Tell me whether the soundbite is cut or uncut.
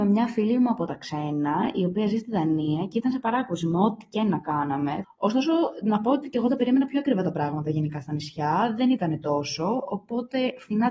cut